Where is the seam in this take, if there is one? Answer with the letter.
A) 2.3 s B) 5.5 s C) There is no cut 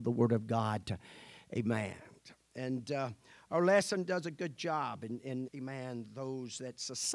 B